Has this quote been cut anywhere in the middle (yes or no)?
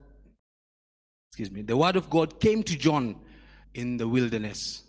yes